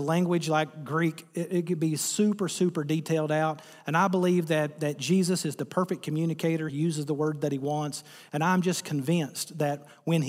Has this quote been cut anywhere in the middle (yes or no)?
no